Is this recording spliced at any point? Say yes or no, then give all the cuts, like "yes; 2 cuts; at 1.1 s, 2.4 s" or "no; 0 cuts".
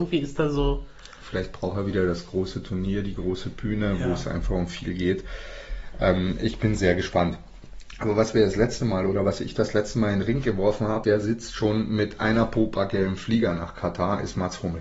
yes; 1 cut; at 11.0 s